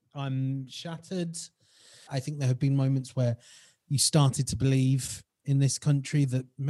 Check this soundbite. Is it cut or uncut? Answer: cut